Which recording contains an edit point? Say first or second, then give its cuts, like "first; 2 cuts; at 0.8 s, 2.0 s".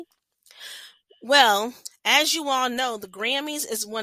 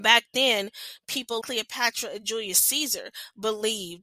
second; 1 cut; at 1.4 s